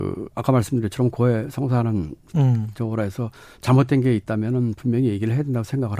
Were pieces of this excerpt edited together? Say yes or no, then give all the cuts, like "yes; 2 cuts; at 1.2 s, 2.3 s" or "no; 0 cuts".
no; 0 cuts